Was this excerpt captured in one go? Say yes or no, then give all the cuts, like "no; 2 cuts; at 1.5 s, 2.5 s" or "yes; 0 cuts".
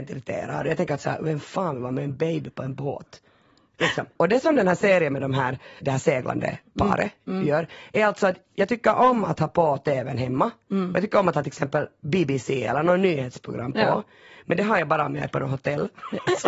no; 1 cut; at 5.8 s